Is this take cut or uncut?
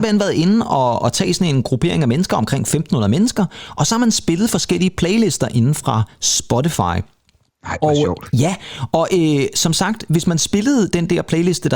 uncut